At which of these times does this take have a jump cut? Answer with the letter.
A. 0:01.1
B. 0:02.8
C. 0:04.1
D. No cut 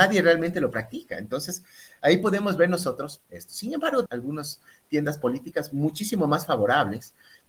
C